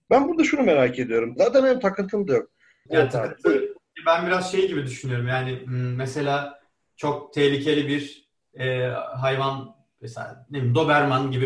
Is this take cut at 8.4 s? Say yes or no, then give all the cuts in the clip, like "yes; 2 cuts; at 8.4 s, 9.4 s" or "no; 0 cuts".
no; 2 cuts; at 1.4 s, 2.9 s